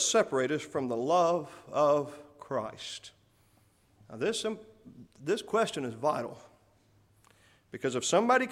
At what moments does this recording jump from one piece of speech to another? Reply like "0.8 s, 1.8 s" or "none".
none